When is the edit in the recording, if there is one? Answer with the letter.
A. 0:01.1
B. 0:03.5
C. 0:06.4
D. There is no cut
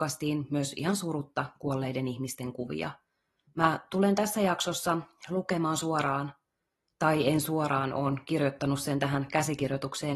B